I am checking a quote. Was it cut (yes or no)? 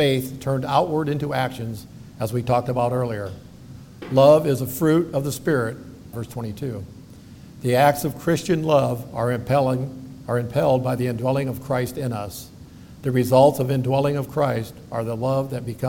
yes